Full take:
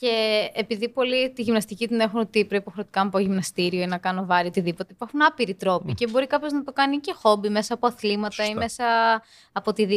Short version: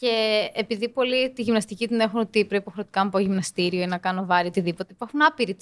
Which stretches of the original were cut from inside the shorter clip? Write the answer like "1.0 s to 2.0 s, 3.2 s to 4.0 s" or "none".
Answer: none